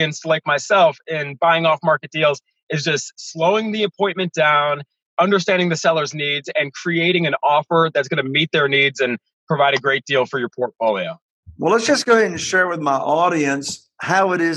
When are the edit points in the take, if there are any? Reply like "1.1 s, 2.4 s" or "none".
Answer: none